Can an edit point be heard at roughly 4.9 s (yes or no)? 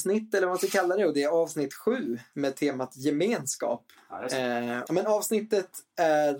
yes